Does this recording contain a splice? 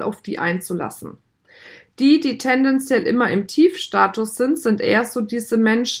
no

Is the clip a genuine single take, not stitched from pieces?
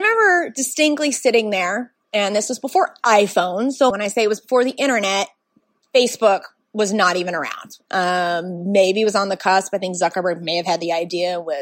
no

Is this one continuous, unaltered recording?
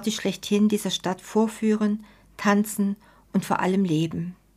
yes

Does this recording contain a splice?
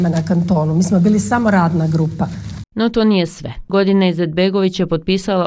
yes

